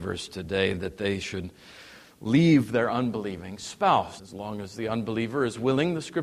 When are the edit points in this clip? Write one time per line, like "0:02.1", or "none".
0:04.2